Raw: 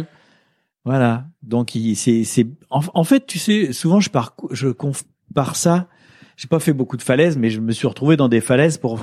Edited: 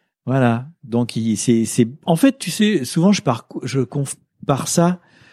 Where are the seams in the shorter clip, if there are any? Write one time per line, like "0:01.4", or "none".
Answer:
0:02.0